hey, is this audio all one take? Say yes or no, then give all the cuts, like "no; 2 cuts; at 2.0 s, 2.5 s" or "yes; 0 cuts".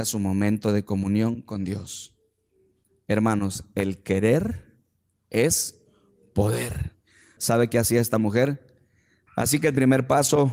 no; 2 cuts; at 7.4 s, 9.3 s